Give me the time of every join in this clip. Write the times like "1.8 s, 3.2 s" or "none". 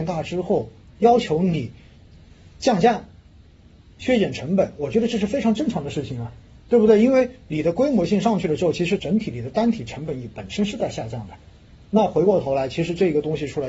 9.0 s